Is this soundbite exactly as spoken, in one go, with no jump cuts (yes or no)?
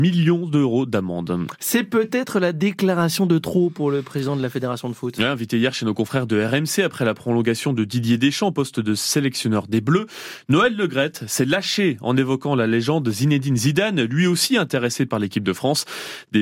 yes